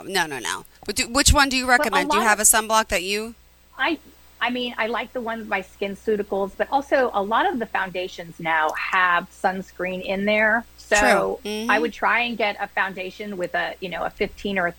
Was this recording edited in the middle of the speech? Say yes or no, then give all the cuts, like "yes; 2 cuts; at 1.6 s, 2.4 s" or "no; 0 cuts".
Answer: no; 0 cuts